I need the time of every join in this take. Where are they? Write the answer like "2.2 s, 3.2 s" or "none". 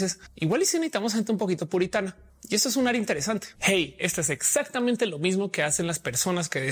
none